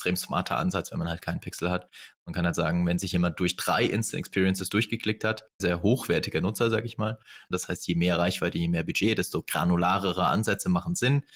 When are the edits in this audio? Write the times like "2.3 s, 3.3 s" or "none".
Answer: 5.6 s, 7.5 s